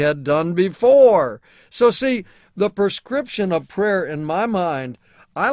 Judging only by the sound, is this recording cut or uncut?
uncut